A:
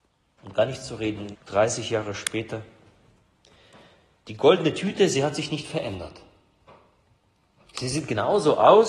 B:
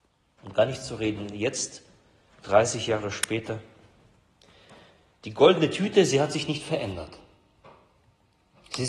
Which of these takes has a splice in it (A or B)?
A